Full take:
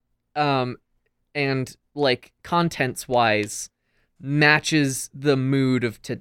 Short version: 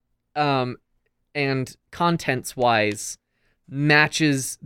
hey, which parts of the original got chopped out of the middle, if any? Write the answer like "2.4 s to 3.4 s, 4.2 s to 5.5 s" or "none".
1.8 s to 2.4 s